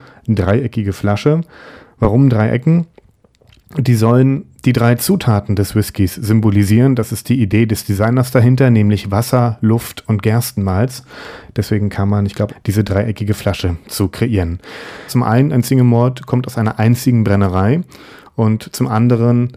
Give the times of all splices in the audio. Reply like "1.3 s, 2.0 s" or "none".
12.5 s, 15.1 s